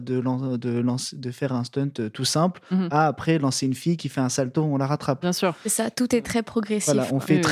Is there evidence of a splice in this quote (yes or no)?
no